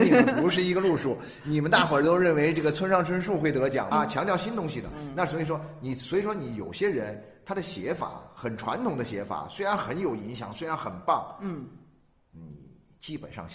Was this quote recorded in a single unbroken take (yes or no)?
no